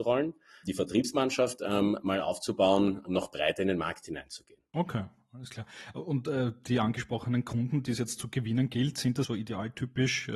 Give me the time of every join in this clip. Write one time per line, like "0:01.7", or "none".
none

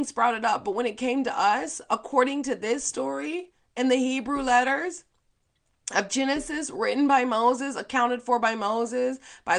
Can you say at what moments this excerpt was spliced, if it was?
none

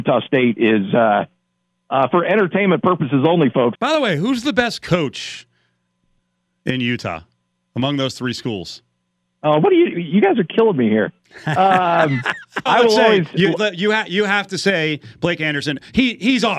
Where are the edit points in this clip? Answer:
0:03.7
0:12.7

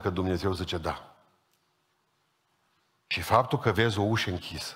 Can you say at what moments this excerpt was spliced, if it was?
none

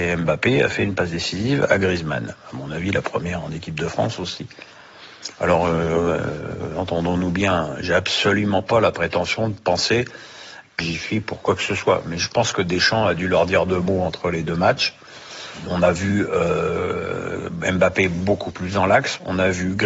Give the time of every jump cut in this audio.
0:10.8

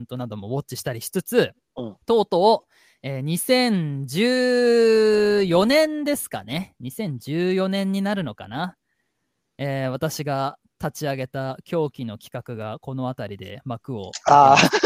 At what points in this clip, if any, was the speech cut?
0:02.0

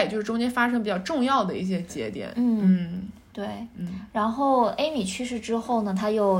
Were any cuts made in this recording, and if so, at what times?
none

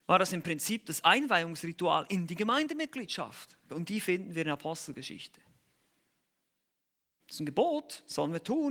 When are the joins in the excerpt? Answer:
0:03.7
0:07.2

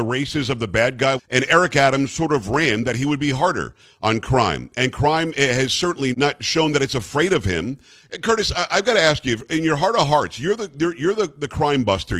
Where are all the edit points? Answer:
0:01.2
0:06.1

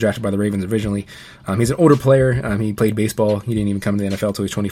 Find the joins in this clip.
none

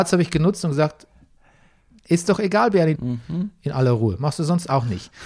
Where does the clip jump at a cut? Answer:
0:03.0

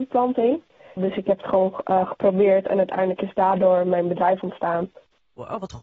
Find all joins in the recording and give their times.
0:01.0

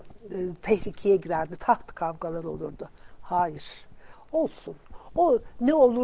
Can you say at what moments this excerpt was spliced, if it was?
none

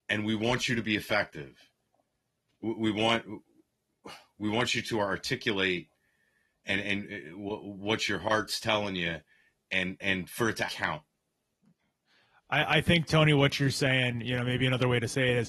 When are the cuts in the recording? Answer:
0:10.7

